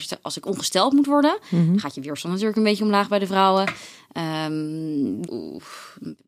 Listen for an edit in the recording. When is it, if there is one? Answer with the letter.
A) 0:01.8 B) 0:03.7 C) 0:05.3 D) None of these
C